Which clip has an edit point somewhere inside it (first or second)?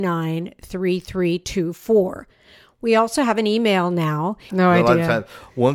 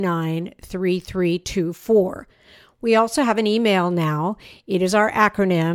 first